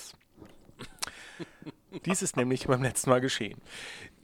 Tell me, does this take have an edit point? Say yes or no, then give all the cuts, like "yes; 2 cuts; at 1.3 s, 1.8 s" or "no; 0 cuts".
yes; 1 cut; at 2.0 s